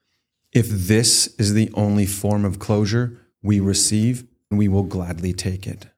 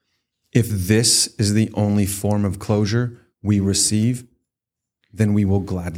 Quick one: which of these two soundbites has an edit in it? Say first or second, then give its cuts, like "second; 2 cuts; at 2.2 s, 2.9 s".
first; 1 cut; at 4.5 s